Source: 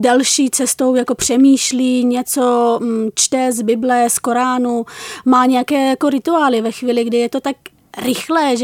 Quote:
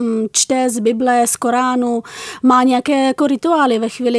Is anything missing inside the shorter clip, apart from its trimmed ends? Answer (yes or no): no